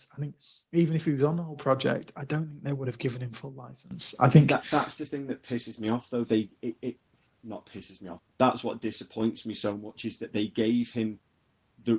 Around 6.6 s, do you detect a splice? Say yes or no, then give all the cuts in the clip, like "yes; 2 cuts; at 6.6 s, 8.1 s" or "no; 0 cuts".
no; 1 cut; at 8.2 s